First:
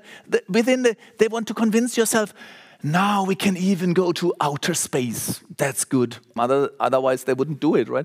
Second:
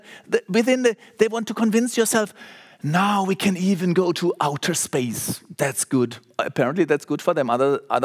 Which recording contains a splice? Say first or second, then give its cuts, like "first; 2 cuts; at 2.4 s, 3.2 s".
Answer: first; 1 cut; at 6.4 s